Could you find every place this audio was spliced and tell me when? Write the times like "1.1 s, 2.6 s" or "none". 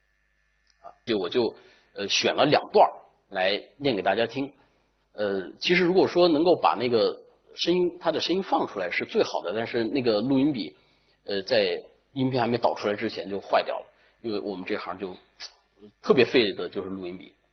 1.1 s